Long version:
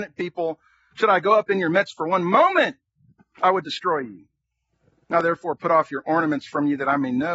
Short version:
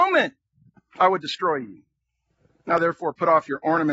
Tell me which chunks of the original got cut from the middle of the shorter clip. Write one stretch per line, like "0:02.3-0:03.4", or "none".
none